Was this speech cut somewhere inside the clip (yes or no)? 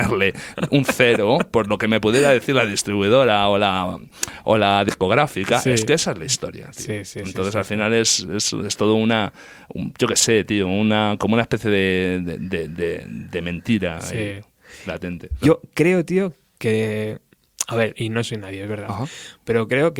yes